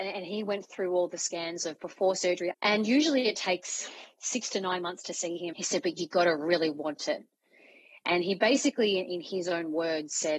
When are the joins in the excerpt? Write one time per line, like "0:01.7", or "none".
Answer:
0:02.5
0:05.5